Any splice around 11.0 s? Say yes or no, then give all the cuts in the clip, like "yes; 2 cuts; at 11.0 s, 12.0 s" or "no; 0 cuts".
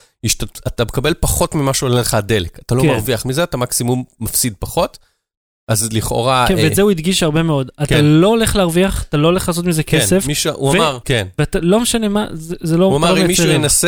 yes; 1 cut; at 11.0 s